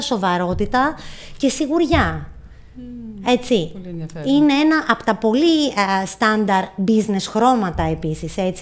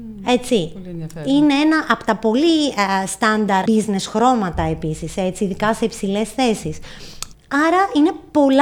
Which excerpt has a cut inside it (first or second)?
second